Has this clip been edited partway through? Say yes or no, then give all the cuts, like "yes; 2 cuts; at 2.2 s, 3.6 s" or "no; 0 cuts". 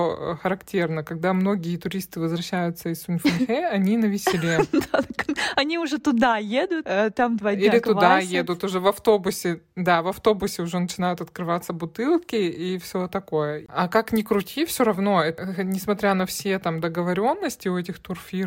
no; 0 cuts